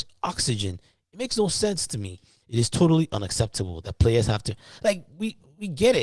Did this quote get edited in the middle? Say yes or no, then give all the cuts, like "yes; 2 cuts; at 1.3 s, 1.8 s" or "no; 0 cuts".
yes; 1 cut; at 2.4 s